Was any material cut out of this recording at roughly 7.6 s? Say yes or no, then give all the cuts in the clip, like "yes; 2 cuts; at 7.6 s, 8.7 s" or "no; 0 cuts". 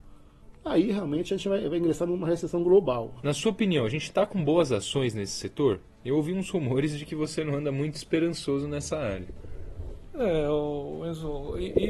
no; 1 cut; at 3.2 s